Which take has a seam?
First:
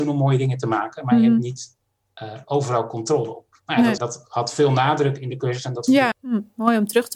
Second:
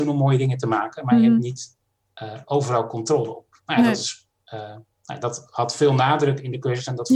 first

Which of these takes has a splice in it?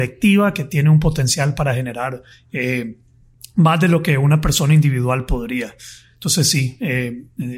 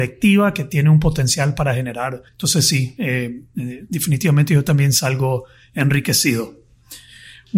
second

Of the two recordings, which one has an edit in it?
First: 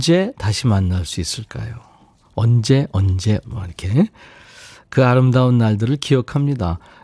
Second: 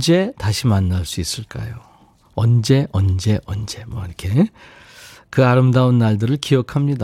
first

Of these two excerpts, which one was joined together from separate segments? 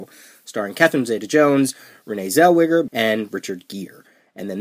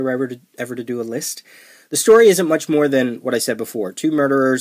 first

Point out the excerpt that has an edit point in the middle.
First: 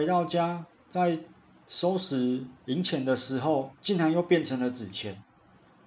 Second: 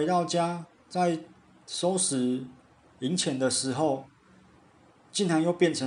first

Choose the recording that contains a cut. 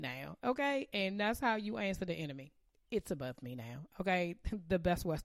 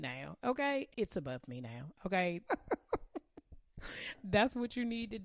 second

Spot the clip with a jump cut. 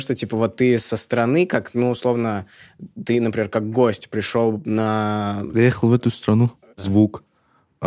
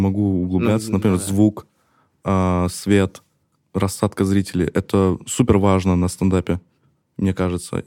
first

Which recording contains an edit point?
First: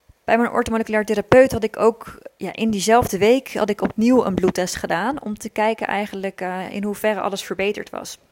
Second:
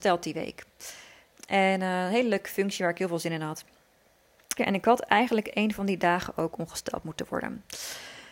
second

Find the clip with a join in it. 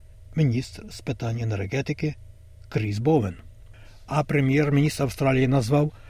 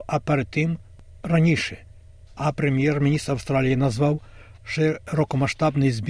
second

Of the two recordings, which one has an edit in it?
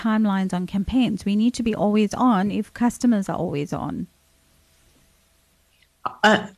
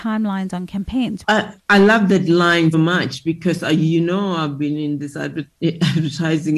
second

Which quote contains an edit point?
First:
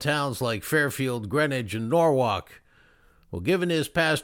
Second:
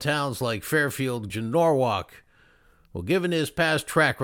second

